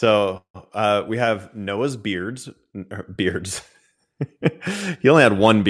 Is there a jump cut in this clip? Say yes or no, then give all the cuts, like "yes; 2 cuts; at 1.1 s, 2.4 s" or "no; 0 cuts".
no; 0 cuts